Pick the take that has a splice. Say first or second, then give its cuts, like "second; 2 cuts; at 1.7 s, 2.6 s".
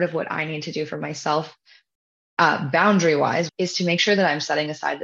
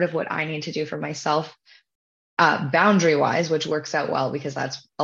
first; 1 cut; at 3.5 s